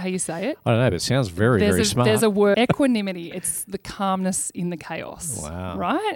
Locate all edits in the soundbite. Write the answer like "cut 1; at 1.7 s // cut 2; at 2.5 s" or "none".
cut 1; at 2.5 s